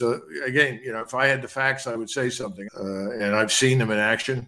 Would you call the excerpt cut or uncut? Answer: cut